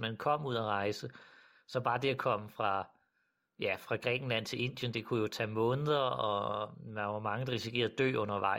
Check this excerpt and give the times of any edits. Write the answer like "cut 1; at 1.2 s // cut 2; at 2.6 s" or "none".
none